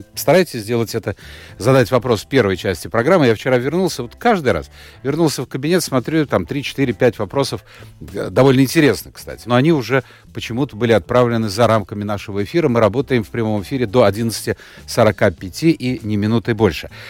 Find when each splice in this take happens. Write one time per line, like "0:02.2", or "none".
0:09.4